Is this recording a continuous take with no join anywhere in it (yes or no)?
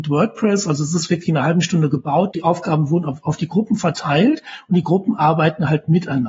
no